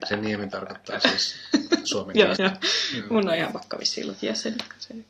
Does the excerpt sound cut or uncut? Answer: cut